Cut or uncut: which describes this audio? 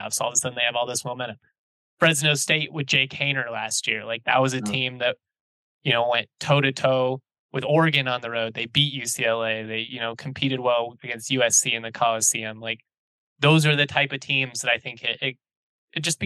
uncut